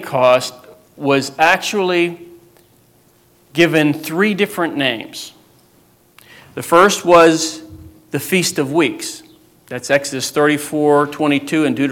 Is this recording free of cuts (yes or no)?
yes